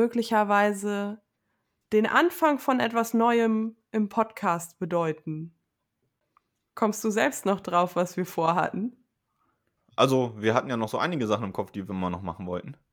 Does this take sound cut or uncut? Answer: cut